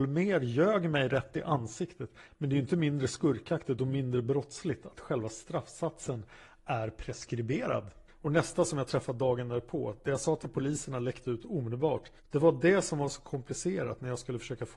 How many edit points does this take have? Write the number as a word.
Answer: three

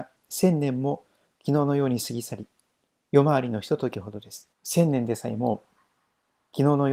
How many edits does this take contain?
one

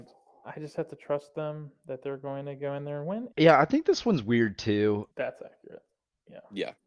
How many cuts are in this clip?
two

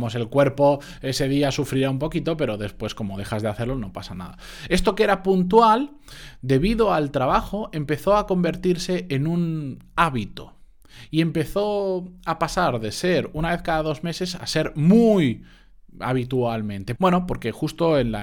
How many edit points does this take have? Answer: one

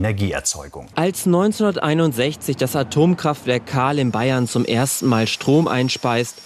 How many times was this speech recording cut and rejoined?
one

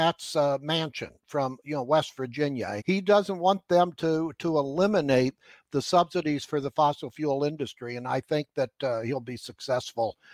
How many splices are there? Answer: one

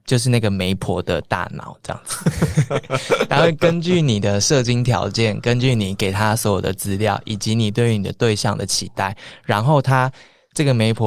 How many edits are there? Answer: zero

